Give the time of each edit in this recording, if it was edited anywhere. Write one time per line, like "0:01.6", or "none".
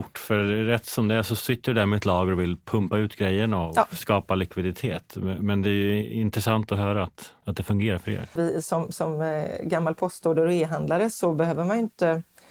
0:08.4